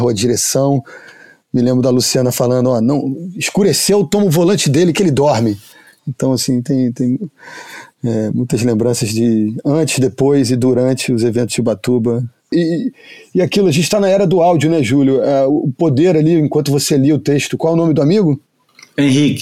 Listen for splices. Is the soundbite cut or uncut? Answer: cut